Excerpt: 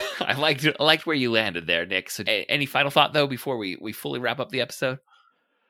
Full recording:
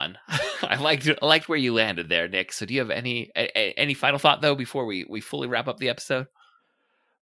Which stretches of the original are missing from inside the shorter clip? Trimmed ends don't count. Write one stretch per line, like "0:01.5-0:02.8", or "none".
0:02.7-0:03.5

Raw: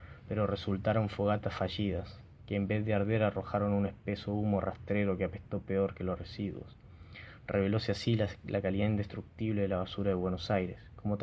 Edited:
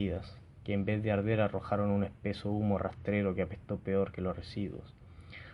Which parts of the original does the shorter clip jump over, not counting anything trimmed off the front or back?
none

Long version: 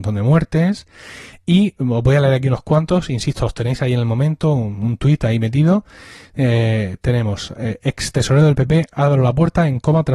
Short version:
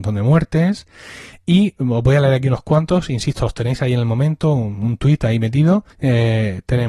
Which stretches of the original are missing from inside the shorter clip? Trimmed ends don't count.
0:05.9-0:06.3

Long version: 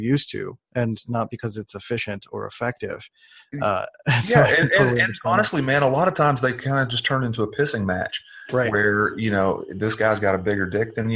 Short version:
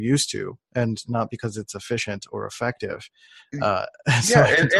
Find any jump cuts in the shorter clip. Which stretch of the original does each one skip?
none

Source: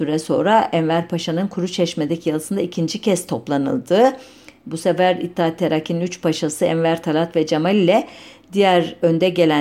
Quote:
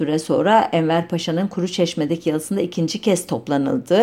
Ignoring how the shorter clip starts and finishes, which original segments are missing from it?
none

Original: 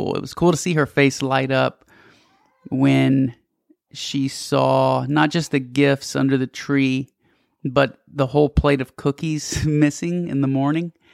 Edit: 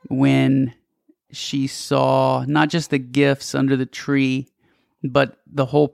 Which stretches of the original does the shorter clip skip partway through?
none

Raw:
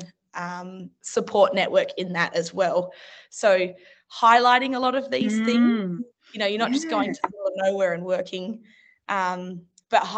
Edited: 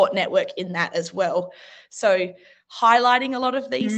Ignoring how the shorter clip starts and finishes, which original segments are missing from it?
none

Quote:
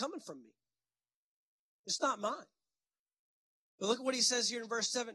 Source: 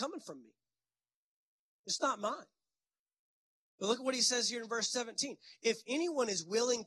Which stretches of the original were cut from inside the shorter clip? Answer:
none

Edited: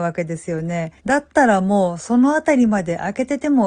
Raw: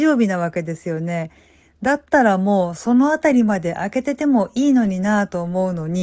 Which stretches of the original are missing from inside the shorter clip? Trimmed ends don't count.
0:01.4-0:01.7

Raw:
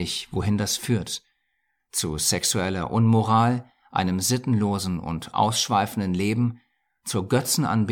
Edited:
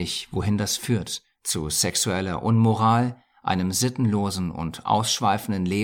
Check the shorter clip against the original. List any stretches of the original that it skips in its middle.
0:01.3-0:01.8

